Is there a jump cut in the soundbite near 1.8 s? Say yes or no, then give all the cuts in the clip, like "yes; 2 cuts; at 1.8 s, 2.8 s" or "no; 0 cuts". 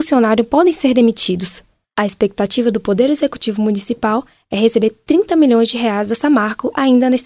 yes; 1 cut; at 1.8 s